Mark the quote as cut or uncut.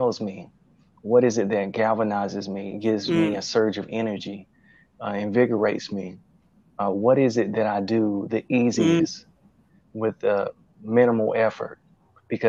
uncut